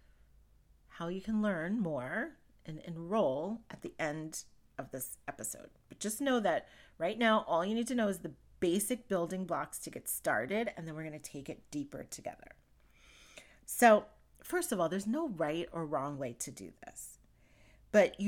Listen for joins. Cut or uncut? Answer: uncut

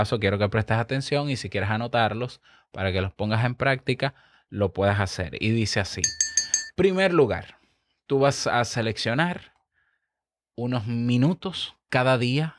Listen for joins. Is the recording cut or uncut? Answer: uncut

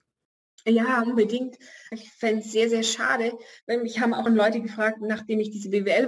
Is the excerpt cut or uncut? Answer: cut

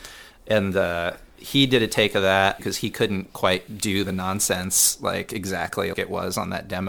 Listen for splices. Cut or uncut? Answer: cut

